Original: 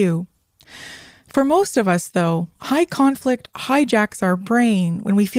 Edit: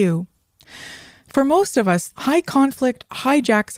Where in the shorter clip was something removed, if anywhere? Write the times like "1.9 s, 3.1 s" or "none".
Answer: 2.1 s